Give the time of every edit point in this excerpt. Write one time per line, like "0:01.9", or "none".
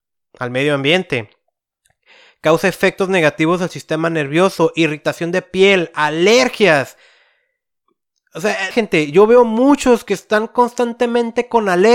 0:08.7